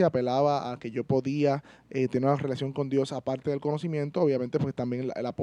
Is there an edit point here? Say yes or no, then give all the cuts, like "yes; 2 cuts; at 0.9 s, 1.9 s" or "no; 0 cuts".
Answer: no; 0 cuts